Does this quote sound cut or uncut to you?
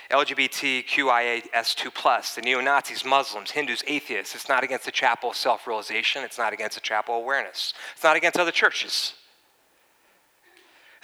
uncut